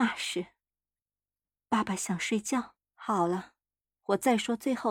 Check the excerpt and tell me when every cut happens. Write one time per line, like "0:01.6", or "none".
0:01.0
0:02.8